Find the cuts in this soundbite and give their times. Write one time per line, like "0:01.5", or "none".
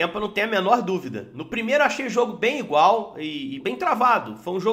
0:03.6